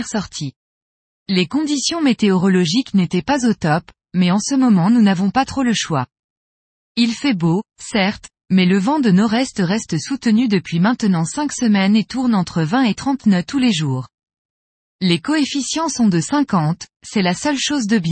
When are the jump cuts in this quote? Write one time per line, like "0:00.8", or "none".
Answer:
0:01.1